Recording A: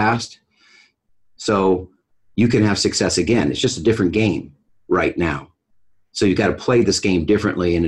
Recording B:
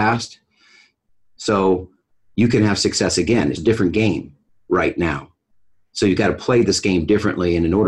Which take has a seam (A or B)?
B